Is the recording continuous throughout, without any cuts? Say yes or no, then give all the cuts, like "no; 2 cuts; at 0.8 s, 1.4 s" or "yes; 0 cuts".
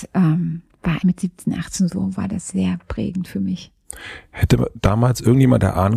no; 1 cut; at 1.0 s